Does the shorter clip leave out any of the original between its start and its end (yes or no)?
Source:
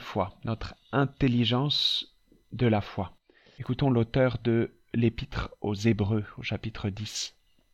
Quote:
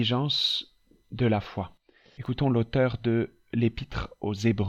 no